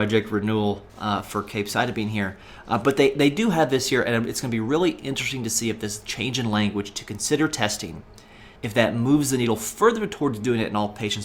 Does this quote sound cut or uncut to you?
cut